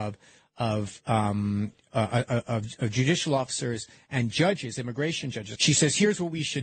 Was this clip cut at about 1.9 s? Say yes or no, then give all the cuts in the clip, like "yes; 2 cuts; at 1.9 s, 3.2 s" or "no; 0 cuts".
yes; 2 cuts; at 1.9 s, 5.6 s